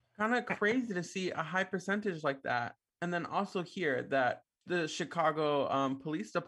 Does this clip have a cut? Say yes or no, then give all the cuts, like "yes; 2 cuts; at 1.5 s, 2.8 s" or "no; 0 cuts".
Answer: no; 0 cuts